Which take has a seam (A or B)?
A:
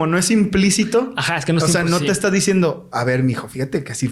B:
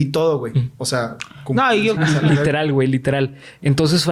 B